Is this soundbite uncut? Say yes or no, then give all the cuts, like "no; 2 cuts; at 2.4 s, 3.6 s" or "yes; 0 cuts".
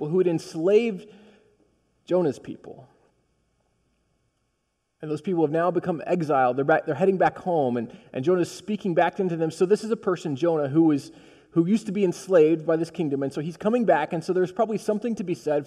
yes; 0 cuts